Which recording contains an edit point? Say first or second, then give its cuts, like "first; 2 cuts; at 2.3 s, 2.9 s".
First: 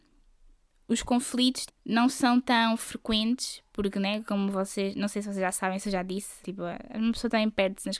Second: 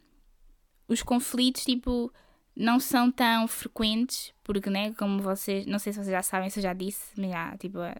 first; 2 cuts; at 1.7 s, 6.4 s